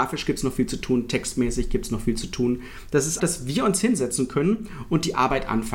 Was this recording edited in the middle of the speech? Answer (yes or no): yes